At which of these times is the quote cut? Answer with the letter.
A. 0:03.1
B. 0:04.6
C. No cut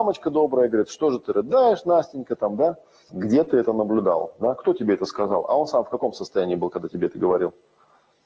A